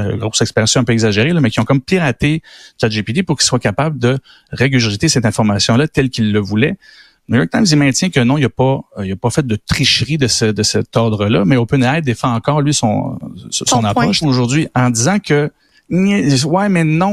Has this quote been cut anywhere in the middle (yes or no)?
yes